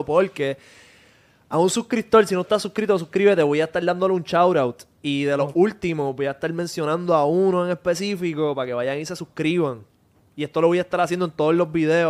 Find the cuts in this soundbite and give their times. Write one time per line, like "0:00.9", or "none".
none